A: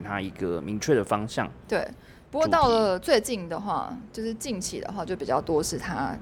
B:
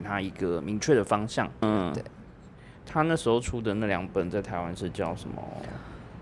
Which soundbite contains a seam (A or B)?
B